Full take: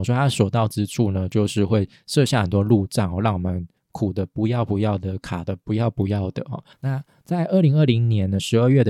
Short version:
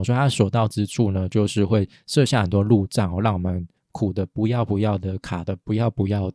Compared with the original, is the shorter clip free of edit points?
yes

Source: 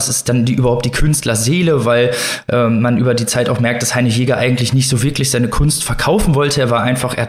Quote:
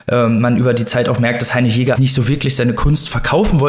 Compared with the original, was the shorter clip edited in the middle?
yes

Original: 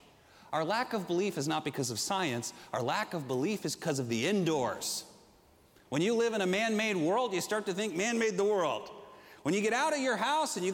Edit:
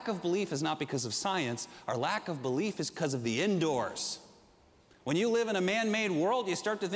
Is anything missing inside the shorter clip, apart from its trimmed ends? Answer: no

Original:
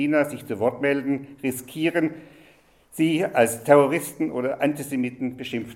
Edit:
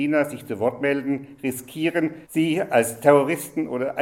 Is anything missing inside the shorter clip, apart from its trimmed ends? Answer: yes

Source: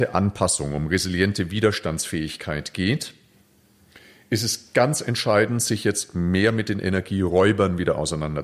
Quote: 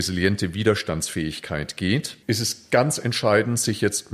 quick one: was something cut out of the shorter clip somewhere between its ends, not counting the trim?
yes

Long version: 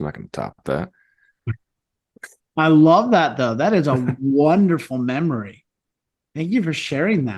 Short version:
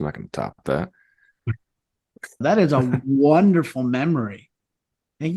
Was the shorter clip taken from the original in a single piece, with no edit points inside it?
no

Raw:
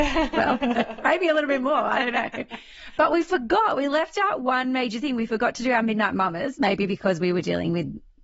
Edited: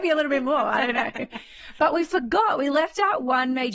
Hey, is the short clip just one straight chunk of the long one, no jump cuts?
yes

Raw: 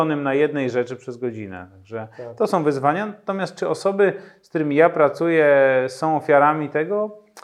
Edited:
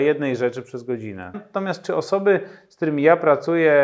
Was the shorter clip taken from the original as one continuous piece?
no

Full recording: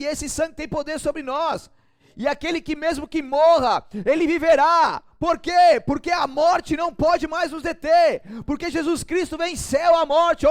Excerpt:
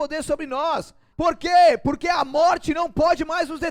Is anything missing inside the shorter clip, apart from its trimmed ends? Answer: yes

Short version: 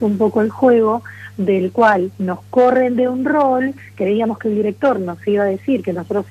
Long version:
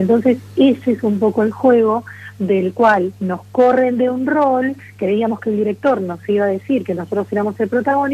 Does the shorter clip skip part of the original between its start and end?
no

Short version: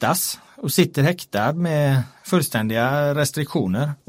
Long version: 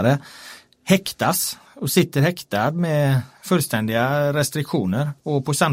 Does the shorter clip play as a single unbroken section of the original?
yes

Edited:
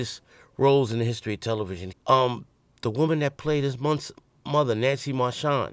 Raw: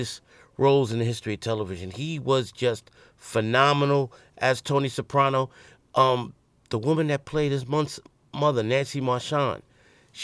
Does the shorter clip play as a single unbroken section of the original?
no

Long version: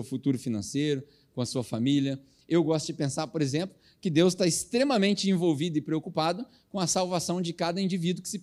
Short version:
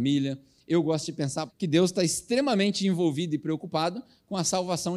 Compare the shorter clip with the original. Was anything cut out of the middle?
yes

